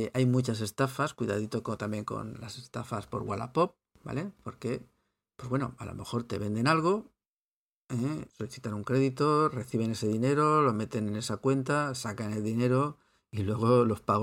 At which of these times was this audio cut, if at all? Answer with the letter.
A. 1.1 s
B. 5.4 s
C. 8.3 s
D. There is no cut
C